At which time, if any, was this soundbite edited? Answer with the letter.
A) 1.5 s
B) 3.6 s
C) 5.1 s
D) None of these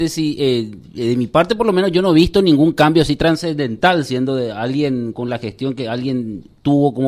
C